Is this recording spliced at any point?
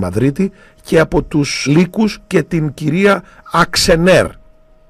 yes; 1 cut; at 1.7 s

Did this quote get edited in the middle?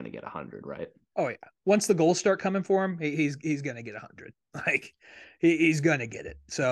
no; 0 cuts

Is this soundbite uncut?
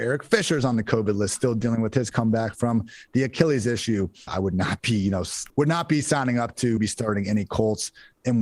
no; 3 cuts; at 4.3 s, 5.5 s, 6.8 s

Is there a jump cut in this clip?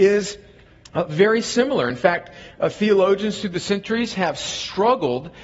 no; 0 cuts

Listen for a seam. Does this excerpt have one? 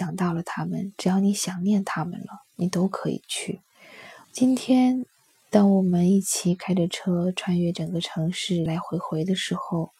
yes; 2 cuts; at 4.2 s, 8.7 s

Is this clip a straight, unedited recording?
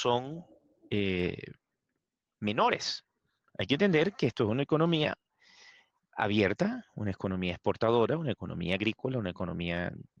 yes; 0 cuts

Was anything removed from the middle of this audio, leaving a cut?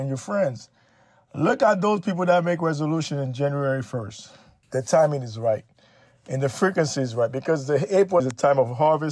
yes; 2 cuts; at 4.6 s, 8.2 s

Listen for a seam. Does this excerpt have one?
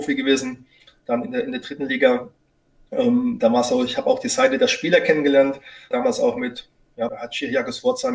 yes; 2 cuts; at 5.9 s, 7.1 s

